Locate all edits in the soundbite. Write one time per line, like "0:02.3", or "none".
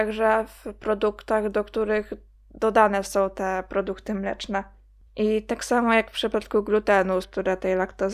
0:05.1
0:07.2